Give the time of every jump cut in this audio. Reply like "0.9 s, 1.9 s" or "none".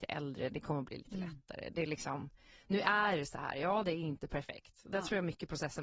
none